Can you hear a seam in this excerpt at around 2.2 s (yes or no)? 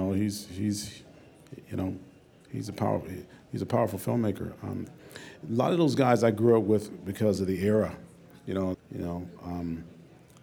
no